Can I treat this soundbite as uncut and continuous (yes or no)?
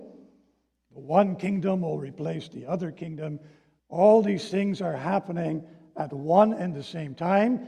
no